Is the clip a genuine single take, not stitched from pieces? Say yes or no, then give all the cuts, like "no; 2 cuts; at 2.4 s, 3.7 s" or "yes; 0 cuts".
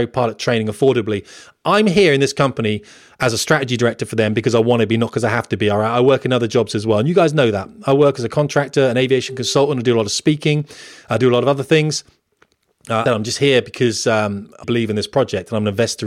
no; 2 cuts; at 13.1 s, 14.6 s